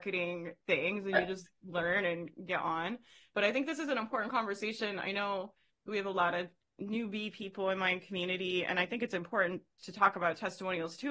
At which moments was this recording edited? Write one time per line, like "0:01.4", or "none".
none